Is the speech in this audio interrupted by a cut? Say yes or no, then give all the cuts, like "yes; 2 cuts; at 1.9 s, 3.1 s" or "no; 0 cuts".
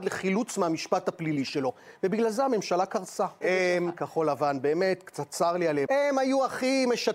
yes; 2 cuts; at 3.4 s, 5.9 s